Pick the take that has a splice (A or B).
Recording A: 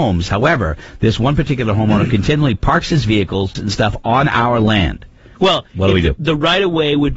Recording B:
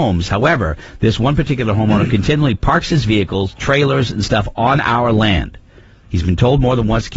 A